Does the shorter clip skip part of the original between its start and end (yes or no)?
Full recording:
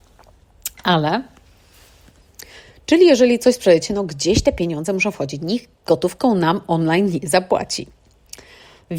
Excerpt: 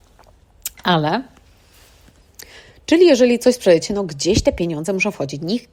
no